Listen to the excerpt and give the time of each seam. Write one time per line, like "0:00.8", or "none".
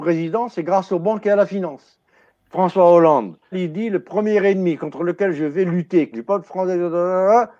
0:03.5
0:06.1